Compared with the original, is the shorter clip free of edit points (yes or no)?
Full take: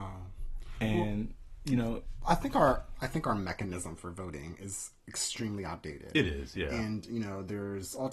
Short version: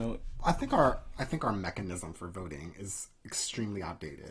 yes